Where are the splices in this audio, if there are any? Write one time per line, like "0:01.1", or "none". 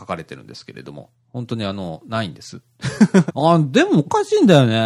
0:03.3